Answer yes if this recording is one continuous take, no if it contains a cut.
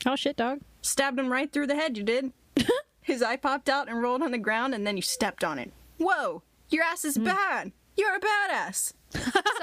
yes